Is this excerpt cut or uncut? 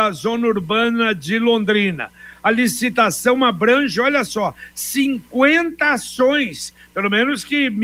uncut